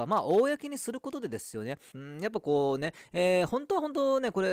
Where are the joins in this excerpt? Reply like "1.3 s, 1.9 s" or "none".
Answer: 1.9 s